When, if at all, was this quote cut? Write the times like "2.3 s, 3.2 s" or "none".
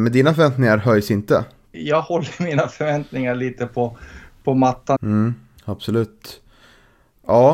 1.7 s, 5.0 s